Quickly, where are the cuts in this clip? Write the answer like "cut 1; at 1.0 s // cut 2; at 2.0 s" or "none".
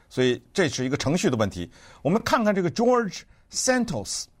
none